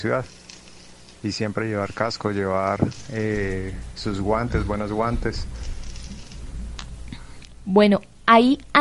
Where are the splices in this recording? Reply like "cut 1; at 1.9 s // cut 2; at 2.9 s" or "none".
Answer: none